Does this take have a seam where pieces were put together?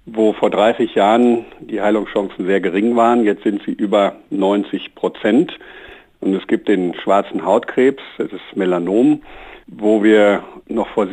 no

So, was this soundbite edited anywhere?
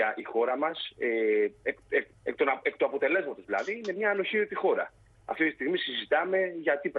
yes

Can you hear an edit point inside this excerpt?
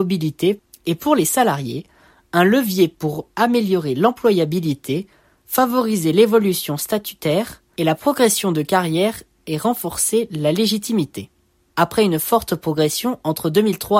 yes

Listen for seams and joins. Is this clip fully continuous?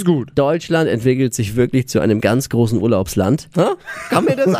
no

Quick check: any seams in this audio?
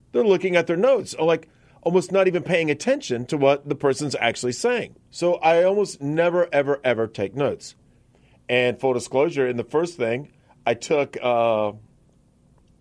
yes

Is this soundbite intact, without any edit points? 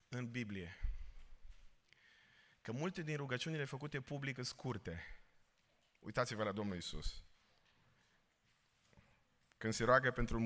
yes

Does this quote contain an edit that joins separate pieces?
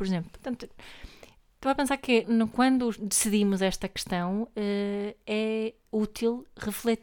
yes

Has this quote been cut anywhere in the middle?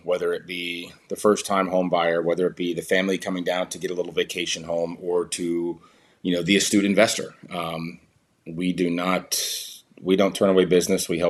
no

